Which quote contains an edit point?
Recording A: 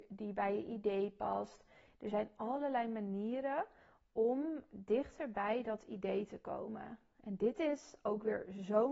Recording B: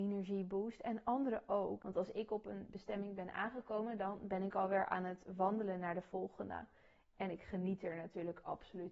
B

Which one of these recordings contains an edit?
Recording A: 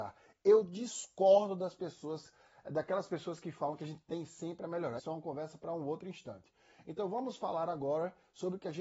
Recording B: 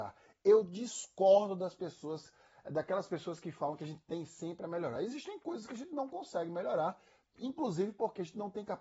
A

